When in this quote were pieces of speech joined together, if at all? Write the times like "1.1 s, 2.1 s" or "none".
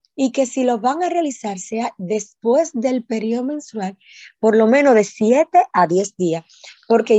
none